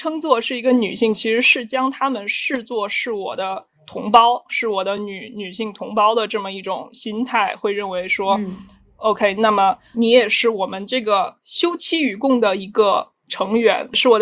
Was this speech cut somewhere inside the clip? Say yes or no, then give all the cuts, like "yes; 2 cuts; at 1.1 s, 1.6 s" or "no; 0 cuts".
no; 0 cuts